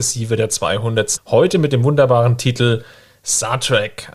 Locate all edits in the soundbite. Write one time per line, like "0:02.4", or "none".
0:01.2